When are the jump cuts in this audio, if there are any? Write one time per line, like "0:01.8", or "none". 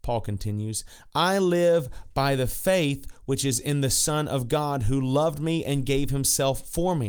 none